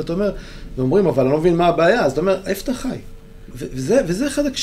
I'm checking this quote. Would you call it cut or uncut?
cut